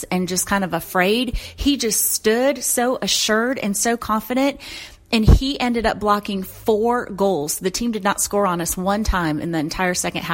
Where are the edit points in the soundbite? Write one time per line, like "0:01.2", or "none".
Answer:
none